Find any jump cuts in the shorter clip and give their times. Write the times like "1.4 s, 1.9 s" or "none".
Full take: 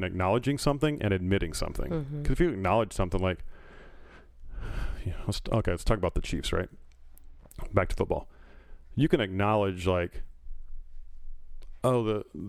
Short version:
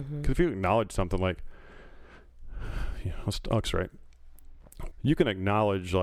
3.6 s, 4.9 s